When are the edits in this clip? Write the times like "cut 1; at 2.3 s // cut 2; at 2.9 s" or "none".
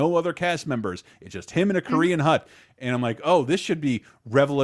none